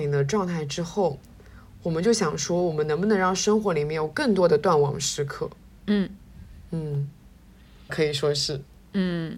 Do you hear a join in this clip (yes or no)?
yes